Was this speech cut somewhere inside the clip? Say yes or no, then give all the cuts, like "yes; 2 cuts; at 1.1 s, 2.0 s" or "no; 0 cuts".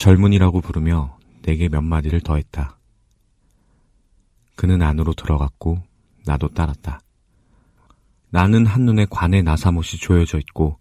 no; 0 cuts